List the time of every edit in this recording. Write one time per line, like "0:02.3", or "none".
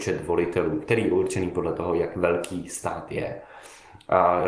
none